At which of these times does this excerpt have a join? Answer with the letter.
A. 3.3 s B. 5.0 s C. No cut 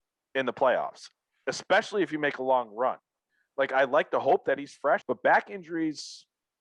B